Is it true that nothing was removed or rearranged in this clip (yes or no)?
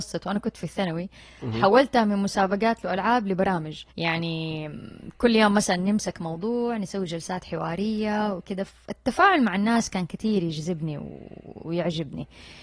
no